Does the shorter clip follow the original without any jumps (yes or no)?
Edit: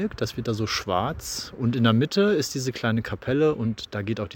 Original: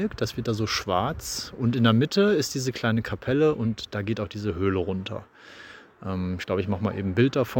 yes